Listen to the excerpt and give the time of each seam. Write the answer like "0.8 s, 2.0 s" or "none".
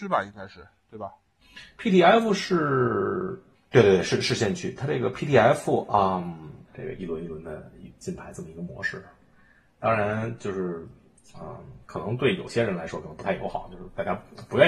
6.7 s